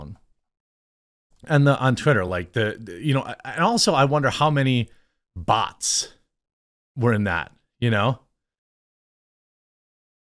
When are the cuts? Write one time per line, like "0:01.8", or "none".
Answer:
none